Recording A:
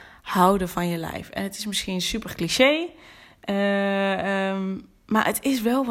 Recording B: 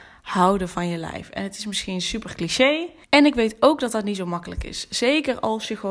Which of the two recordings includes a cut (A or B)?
B